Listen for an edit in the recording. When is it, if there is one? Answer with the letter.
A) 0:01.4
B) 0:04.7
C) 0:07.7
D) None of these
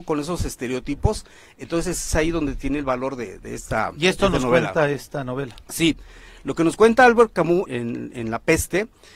C